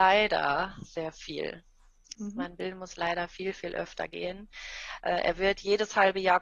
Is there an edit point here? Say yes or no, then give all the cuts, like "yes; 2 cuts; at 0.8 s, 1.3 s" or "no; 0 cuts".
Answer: yes; 1 cut; at 2.1 s